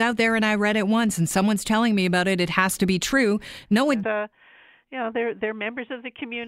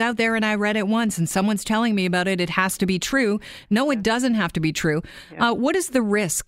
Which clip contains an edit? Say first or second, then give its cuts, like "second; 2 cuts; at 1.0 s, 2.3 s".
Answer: first; 1 cut; at 4.0 s